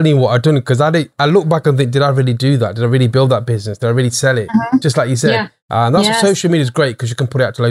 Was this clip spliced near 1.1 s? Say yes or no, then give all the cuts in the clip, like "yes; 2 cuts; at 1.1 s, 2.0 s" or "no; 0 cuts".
no; 1 cut; at 5.6 s